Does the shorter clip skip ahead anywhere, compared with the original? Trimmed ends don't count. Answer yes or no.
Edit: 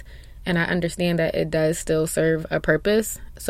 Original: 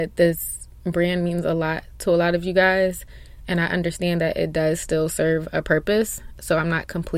no